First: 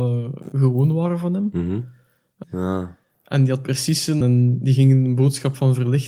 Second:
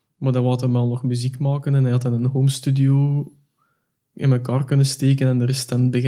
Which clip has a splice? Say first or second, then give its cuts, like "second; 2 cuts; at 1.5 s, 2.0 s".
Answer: first; 2 cuts; at 2.4 s, 4.2 s